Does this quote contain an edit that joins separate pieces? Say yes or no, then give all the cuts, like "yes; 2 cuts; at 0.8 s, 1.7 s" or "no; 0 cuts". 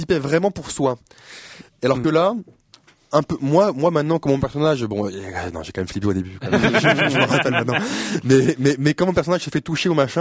no; 0 cuts